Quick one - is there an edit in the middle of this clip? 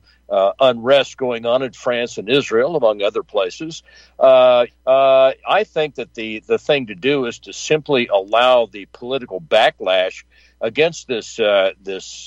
yes; 1 cut; at 4.7 s

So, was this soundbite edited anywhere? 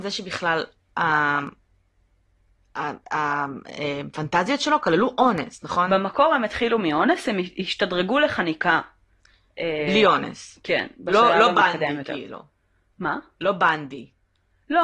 no; 0 cuts

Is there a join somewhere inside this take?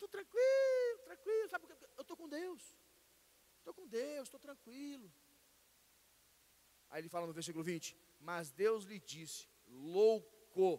no; 0 cuts

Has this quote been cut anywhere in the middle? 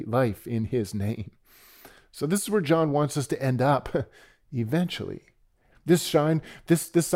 yes; 1 cut; at 5.7 s

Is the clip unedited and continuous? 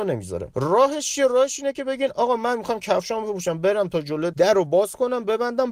no; 1 cut; at 4.3 s

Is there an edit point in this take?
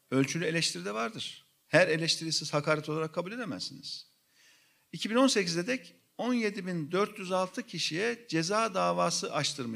no; 0 cuts

